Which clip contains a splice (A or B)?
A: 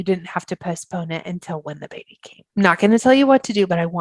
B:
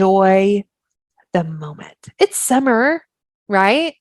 A